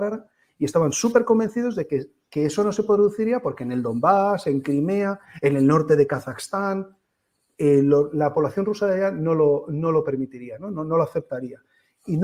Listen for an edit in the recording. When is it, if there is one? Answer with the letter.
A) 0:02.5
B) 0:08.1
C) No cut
C